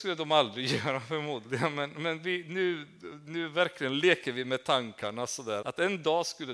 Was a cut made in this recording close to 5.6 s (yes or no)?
yes